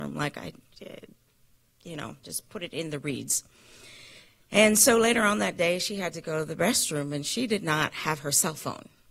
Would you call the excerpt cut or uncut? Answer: uncut